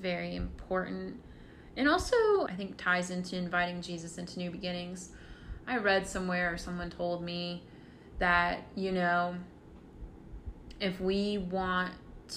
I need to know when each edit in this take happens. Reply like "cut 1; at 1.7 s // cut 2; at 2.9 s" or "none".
cut 1; at 2.5 s